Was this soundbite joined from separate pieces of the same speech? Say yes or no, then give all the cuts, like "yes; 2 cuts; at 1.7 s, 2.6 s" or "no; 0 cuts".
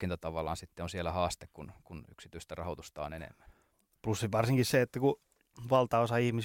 no; 0 cuts